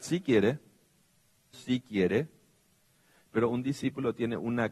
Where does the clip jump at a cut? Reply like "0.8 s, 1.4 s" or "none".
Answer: 1.5 s